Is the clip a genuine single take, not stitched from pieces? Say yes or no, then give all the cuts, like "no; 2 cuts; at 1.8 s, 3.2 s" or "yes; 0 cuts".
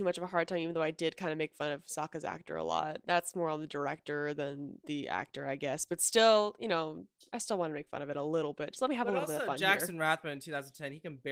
yes; 0 cuts